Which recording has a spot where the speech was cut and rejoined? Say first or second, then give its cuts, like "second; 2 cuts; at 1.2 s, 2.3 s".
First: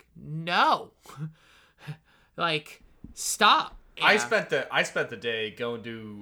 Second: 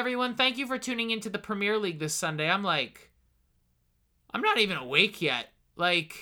first; 1 cut; at 4.0 s